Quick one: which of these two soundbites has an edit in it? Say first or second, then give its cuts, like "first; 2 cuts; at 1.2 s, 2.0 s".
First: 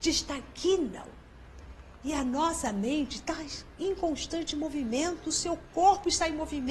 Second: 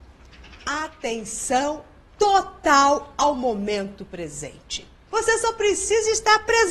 second; 1 cut; at 5.1 s